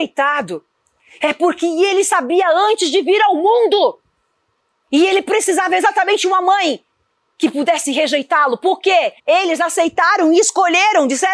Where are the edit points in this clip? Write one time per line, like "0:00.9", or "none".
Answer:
0:09.2